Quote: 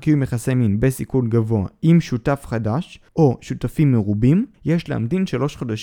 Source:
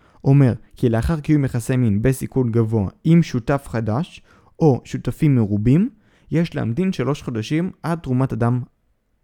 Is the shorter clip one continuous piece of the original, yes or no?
no